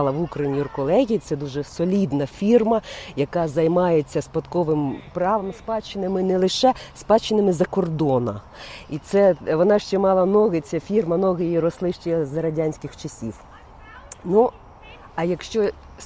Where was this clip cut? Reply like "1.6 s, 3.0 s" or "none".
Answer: none